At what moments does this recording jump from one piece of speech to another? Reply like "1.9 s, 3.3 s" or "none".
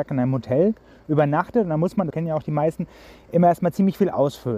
2.1 s